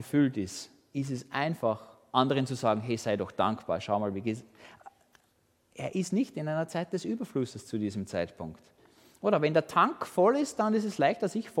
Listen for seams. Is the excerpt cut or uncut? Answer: uncut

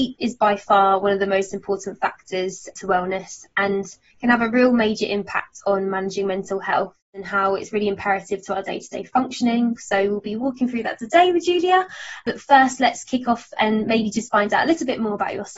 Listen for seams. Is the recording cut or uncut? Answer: uncut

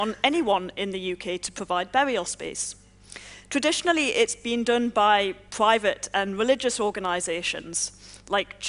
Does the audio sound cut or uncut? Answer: uncut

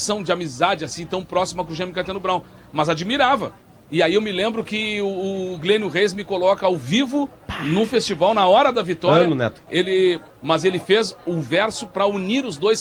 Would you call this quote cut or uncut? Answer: cut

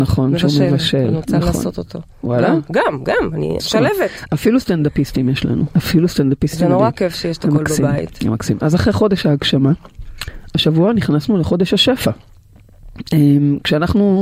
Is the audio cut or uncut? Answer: cut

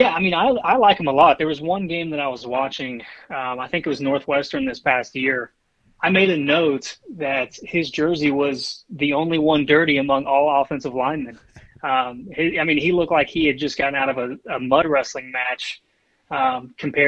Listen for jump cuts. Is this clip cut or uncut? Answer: uncut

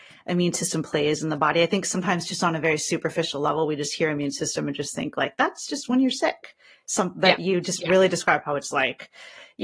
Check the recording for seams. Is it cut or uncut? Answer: uncut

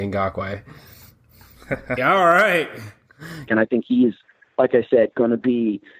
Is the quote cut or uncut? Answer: cut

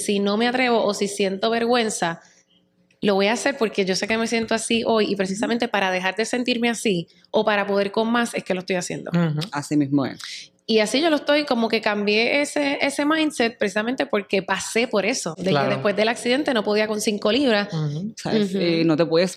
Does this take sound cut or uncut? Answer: cut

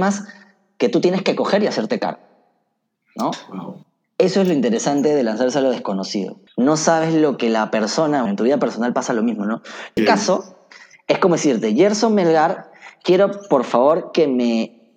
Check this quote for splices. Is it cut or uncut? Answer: cut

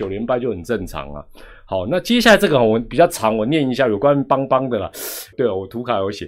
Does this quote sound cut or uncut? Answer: cut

